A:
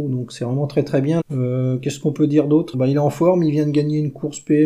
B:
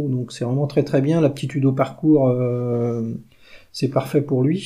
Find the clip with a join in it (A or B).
A